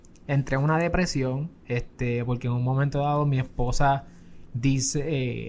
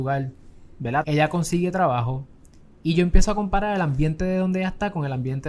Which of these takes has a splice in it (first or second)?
second